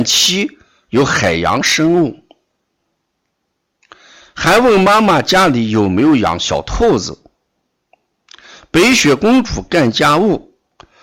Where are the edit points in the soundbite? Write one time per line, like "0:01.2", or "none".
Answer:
none